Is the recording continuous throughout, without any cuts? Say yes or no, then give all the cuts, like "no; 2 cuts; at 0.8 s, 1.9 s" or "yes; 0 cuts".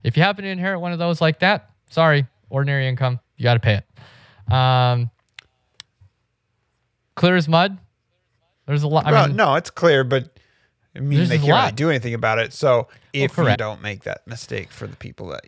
no; 1 cut; at 13.5 s